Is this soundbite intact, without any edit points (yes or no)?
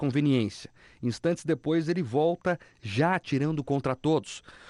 yes